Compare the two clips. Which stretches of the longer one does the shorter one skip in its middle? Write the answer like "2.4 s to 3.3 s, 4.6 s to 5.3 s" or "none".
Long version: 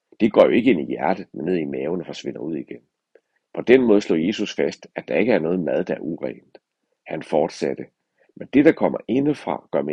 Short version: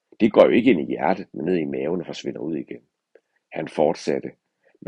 3.4 s to 7.0 s